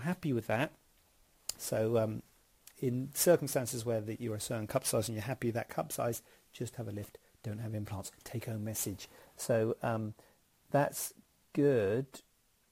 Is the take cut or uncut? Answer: cut